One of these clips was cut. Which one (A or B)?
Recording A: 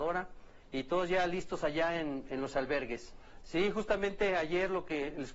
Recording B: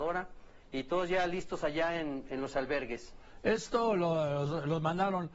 A